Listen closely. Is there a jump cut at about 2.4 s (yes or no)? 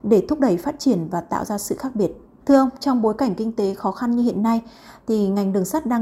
yes